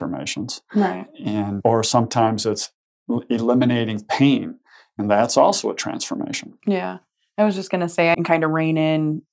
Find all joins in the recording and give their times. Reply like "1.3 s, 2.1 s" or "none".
8.1 s